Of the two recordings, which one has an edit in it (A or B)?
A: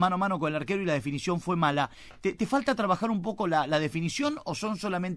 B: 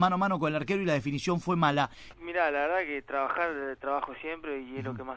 B